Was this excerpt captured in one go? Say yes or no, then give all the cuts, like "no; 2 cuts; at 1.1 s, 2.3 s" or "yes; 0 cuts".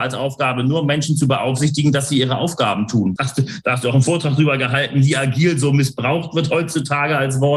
no; 1 cut; at 3.2 s